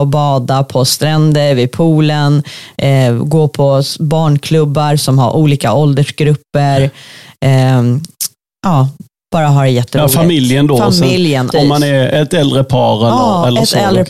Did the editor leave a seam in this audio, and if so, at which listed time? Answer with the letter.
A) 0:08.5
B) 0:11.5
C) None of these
B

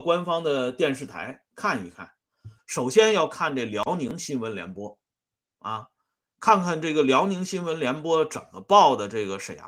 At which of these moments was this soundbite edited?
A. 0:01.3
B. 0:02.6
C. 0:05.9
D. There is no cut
B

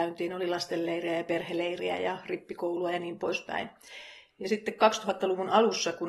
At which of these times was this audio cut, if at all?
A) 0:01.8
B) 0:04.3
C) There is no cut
B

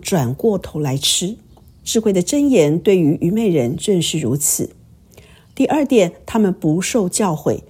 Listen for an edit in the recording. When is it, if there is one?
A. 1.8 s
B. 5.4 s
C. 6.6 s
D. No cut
A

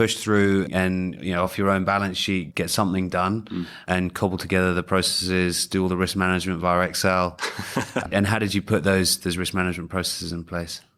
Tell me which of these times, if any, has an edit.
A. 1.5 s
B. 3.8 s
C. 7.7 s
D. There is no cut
D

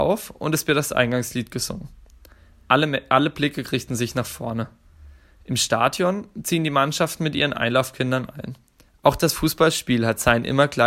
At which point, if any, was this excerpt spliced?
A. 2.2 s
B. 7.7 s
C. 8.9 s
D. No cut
C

